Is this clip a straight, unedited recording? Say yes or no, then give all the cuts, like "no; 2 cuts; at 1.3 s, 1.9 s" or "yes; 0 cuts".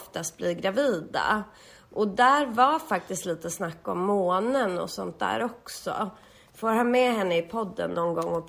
yes; 0 cuts